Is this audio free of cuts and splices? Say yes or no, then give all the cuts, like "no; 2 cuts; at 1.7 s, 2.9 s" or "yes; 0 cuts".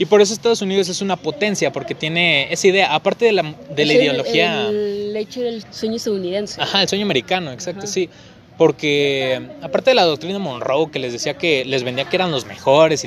no; 1 cut; at 5.6 s